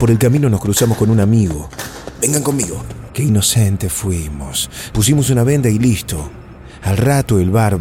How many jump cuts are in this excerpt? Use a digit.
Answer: 2